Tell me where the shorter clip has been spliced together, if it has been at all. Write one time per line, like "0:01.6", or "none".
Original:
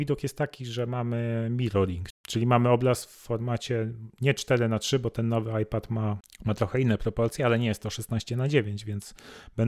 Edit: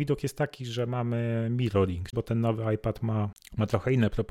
0:02.1